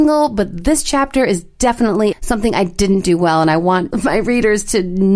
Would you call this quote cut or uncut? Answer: cut